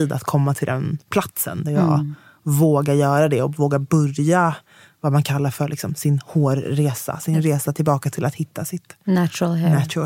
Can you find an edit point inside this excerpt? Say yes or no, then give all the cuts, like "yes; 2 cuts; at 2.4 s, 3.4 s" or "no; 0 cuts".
no; 0 cuts